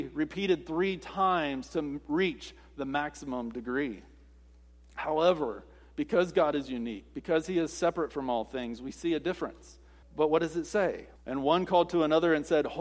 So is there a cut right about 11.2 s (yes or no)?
yes